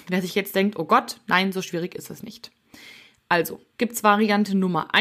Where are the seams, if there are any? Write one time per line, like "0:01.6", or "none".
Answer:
0:03.7

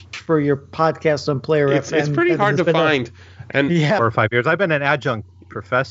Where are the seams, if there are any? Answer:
0:04.0

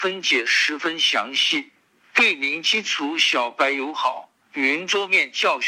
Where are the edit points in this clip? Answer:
0:04.4

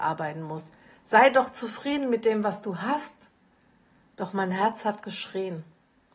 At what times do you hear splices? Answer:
none

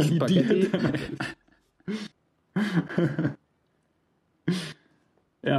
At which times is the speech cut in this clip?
0:02.1

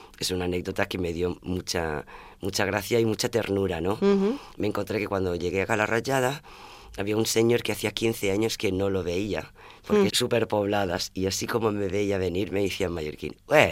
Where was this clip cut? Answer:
0:10.1

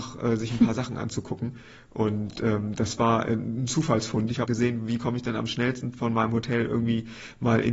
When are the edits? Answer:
0:04.5

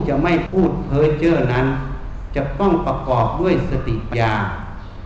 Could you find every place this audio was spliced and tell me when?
0:04.1

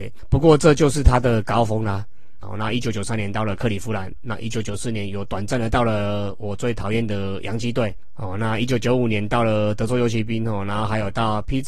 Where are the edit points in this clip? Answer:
0:02.4

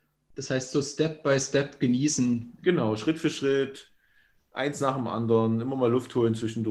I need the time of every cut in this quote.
none

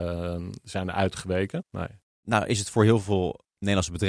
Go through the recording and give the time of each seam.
0:01.6

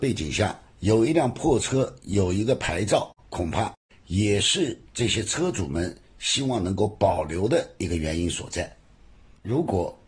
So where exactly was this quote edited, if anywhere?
0:04.9

